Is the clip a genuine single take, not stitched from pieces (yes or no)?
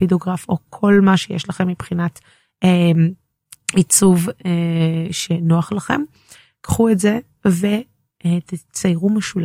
yes